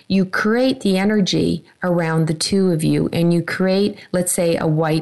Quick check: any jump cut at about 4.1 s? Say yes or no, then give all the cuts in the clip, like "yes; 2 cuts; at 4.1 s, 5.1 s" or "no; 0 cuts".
no; 0 cuts